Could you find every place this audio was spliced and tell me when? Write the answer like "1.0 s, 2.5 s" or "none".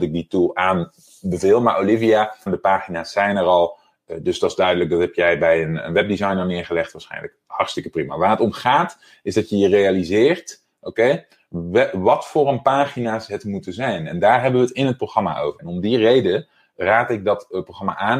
2.5 s, 15.6 s